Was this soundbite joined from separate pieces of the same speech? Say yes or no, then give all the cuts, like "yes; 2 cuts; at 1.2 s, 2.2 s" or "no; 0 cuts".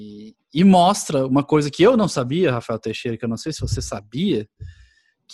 no; 0 cuts